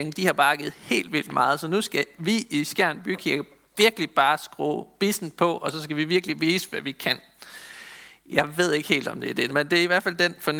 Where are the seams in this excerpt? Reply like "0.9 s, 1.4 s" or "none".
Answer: 9.5 s